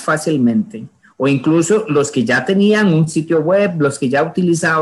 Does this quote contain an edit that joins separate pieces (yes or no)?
no